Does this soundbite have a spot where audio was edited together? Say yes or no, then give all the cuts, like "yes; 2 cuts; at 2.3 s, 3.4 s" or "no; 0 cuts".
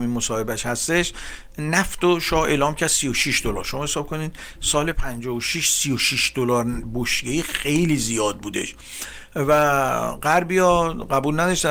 no; 0 cuts